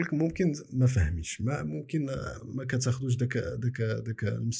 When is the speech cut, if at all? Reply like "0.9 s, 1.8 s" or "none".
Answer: 2.4 s

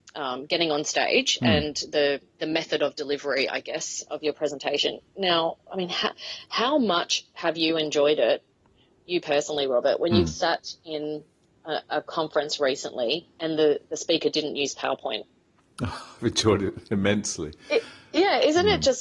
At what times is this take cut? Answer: none

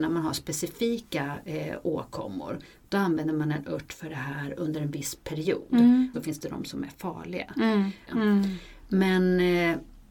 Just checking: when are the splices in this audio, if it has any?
6.1 s, 8.1 s

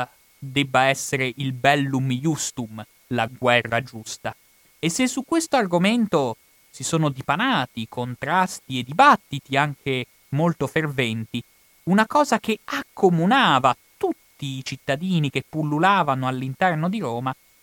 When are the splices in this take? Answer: 3.0 s

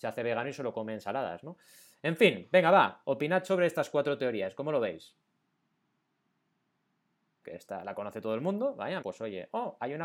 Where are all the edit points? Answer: 7.4 s, 9.0 s

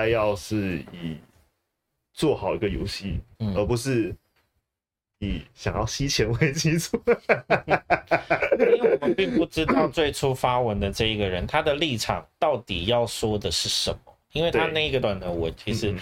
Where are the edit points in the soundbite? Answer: 3.3 s, 15.0 s

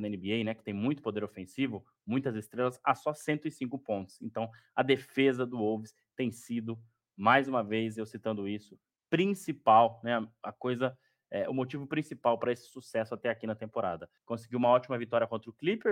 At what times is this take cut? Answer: 14.2 s

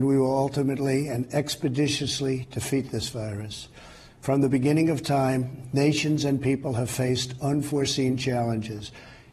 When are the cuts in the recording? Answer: none

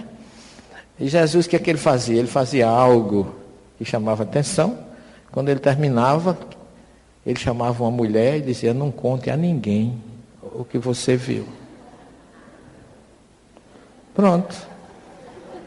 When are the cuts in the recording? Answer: none

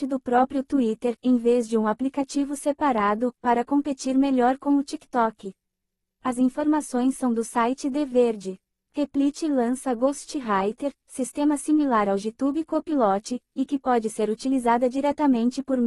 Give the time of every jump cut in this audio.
none

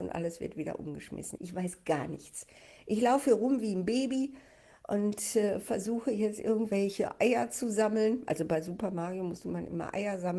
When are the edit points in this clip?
1.4 s

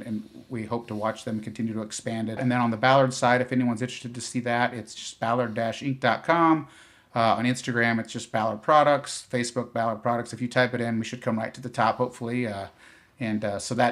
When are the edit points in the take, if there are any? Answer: 2.4 s

